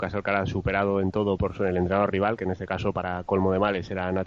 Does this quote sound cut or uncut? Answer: cut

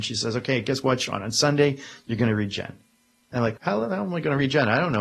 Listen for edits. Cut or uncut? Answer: cut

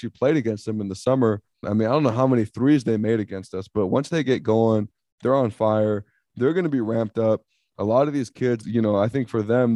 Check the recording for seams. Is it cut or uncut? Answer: cut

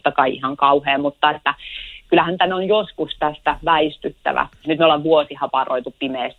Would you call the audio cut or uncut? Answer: cut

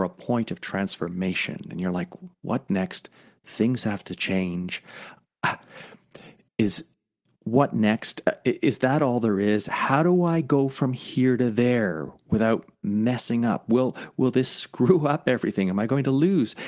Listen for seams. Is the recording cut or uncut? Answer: uncut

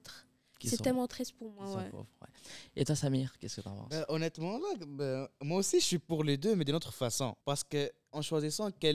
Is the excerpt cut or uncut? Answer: uncut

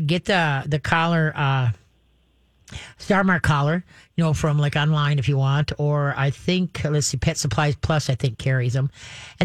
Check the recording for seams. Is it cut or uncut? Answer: uncut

